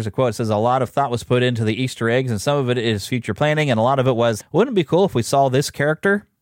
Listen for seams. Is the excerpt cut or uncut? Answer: cut